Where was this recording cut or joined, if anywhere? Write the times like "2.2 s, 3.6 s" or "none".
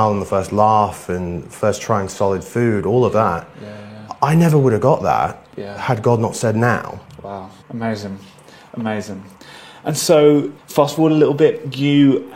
7.6 s, 10.6 s